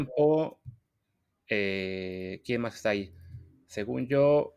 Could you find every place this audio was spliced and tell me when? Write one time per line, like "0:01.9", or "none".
none